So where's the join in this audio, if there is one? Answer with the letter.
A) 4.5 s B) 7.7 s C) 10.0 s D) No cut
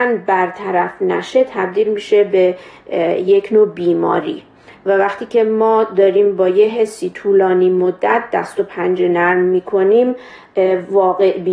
D